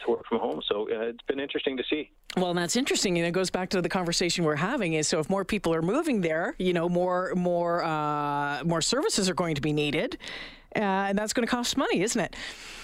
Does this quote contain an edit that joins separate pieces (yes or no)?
no